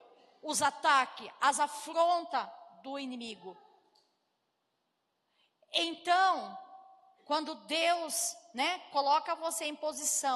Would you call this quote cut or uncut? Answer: uncut